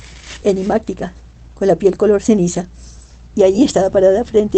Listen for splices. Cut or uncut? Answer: cut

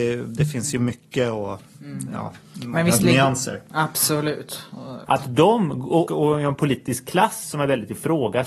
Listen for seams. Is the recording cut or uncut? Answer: cut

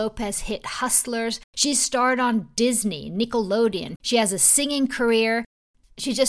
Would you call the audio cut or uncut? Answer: cut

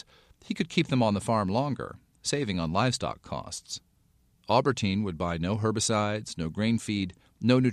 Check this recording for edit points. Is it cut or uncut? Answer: cut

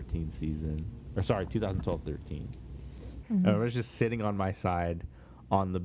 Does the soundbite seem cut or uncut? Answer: cut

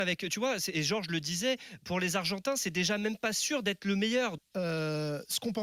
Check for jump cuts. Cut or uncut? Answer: cut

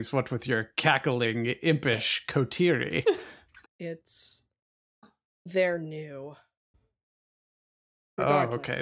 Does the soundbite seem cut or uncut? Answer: cut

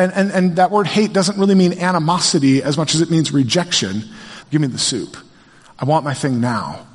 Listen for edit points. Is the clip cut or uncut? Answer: cut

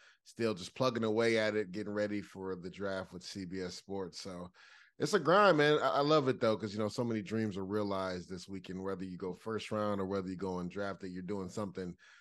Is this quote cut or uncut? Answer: uncut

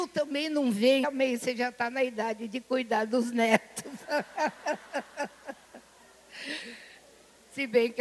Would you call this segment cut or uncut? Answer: cut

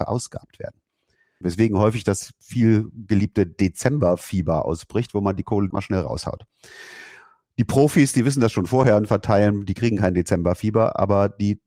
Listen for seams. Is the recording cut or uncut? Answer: cut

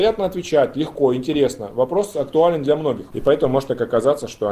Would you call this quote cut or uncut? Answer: cut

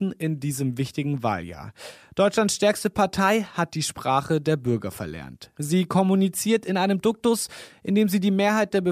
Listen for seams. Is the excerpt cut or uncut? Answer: uncut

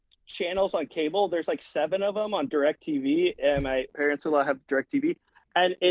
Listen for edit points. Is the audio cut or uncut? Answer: cut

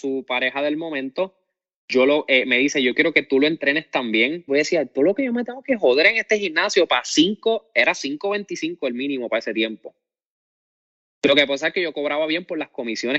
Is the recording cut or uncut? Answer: cut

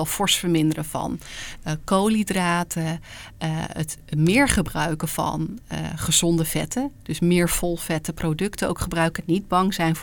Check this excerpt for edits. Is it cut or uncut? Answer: uncut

